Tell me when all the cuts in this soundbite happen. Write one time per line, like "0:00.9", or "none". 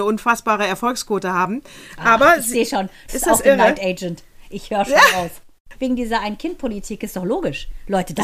0:03.1
0:05.7